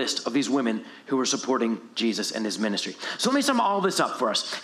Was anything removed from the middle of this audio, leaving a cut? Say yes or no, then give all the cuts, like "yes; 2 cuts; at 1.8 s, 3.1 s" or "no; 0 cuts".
no; 0 cuts